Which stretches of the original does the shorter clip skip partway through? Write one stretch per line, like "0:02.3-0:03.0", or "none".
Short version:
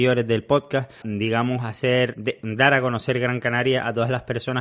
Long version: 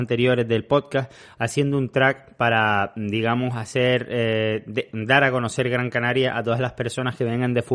0:01.2-0:02.9
0:04.1-0:04.6